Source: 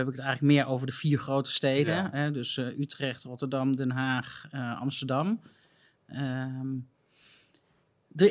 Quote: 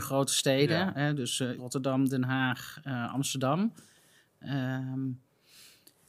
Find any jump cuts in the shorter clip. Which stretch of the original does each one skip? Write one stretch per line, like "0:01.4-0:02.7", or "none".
0:02.7-0:03.2